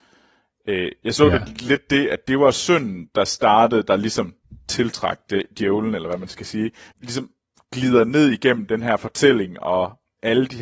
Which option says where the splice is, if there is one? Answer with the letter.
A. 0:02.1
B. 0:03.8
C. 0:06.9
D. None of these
C